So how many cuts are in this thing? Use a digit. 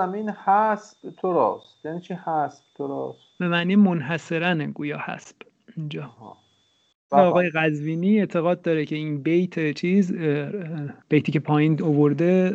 2